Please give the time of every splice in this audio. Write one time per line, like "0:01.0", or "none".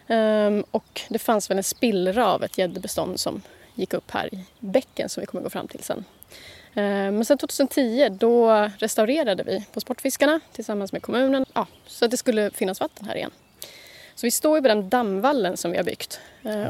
0:11.4